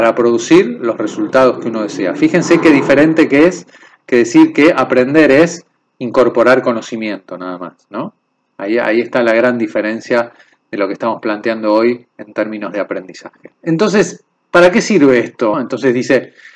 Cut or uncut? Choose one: cut